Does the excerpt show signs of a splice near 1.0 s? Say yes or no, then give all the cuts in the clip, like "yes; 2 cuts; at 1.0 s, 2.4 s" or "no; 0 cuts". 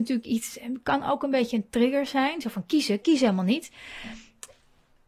no; 1 cut; at 3.0 s